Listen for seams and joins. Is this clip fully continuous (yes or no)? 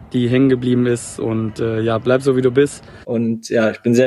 no